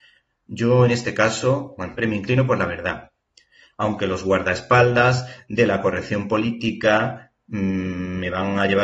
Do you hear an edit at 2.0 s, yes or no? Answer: yes